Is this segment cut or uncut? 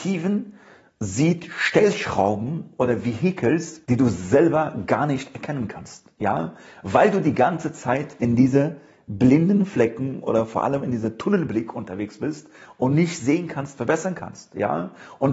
cut